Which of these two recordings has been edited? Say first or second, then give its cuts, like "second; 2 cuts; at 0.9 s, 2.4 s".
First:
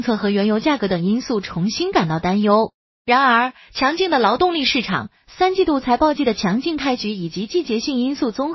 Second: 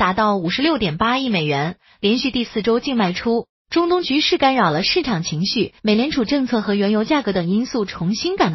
second; 2 cuts; at 3.6 s, 5.8 s